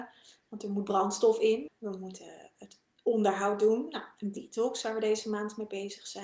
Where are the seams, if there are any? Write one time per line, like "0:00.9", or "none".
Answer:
0:01.7